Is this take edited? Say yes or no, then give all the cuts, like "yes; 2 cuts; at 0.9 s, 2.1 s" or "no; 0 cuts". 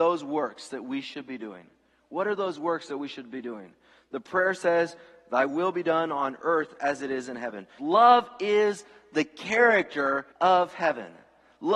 yes; 2 cuts; at 7.8 s, 10.3 s